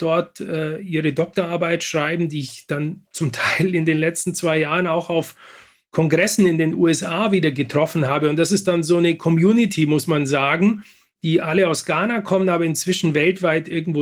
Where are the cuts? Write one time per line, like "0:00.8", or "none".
none